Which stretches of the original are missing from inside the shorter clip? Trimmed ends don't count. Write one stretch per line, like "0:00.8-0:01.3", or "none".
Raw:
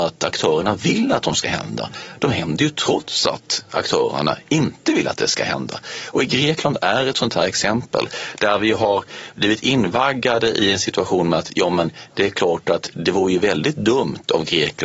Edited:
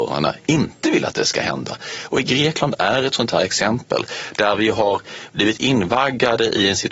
none